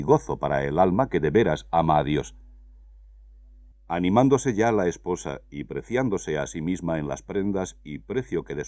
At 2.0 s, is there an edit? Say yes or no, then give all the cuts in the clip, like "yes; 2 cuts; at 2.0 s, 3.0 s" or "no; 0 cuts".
no; 1 cut; at 3.7 s